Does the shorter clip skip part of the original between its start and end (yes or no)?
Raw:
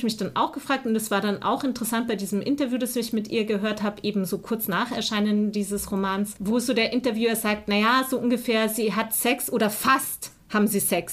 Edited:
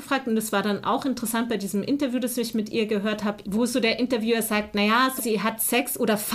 yes